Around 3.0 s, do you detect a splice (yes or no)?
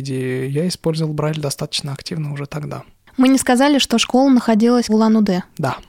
no